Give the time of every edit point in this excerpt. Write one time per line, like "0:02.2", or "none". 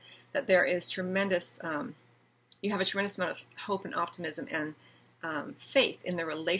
none

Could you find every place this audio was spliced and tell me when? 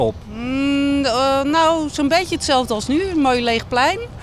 none

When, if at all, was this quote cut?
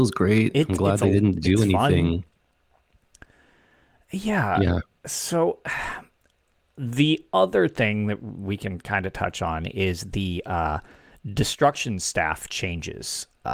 none

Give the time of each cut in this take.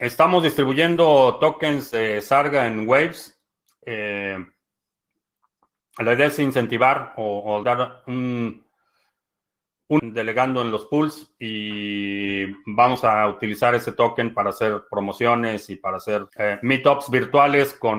0:07.6
0:10.0
0:16.3

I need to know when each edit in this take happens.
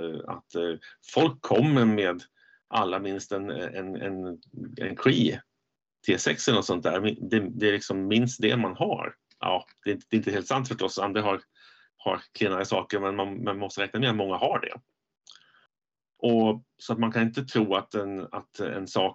none

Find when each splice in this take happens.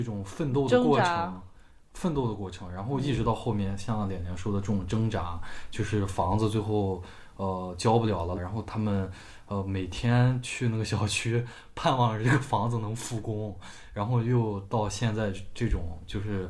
0:08.3

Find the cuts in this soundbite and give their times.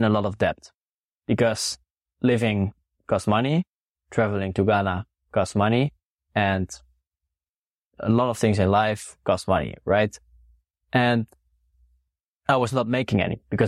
none

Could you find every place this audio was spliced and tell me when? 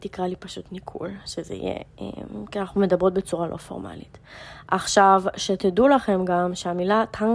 none

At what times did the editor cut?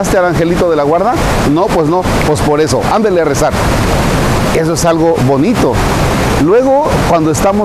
none

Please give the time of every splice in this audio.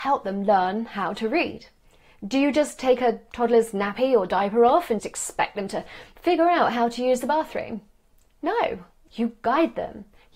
0:05.0
0:09.1

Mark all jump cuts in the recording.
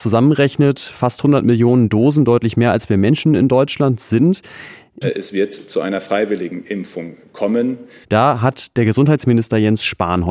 0:05.0
0:08.0

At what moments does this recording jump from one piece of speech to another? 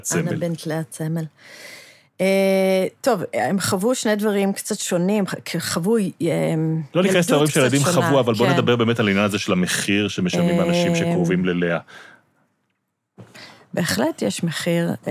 none

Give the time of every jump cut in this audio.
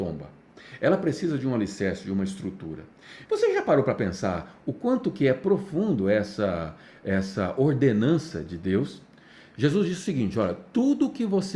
0:03.3

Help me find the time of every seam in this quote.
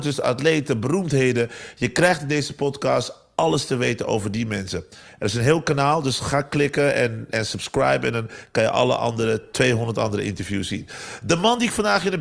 none

